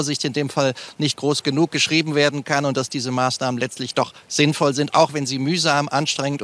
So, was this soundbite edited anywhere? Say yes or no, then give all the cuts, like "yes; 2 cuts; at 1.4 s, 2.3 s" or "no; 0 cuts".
no; 0 cuts